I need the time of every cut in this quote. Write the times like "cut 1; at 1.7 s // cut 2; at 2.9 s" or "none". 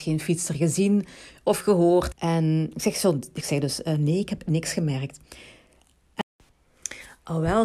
cut 1; at 2.1 s